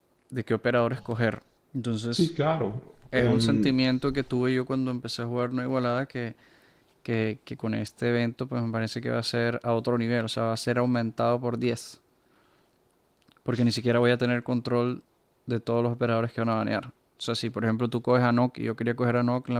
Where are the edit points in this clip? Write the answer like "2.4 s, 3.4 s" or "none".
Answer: 1.6 s